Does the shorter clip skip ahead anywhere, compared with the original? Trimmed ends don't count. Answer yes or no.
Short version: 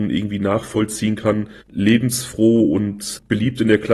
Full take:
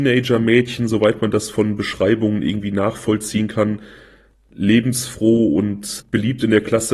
yes